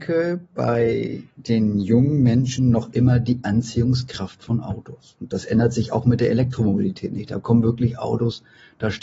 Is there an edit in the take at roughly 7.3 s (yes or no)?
no